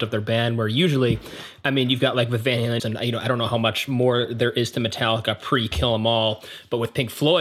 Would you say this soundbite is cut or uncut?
cut